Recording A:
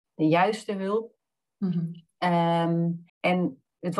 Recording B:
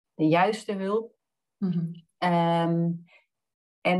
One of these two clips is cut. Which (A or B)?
A